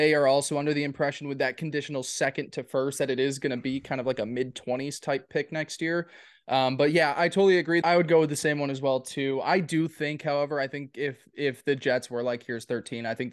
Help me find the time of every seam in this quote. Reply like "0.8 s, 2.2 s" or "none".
7.8 s